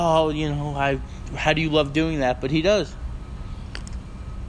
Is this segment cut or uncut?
uncut